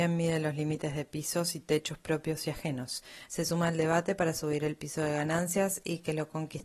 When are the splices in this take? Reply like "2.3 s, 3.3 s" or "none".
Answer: 3.3 s